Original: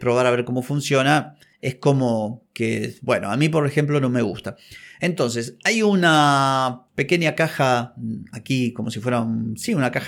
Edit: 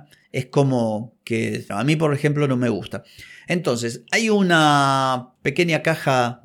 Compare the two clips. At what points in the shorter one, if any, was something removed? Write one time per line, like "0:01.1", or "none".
0:01.7